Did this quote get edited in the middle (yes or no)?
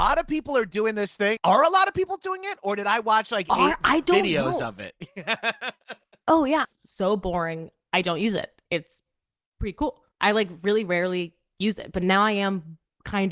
yes